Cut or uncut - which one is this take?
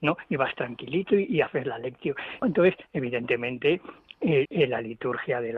cut